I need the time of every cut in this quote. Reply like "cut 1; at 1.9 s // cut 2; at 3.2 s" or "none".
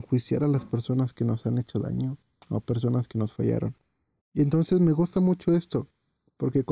cut 1; at 4.2 s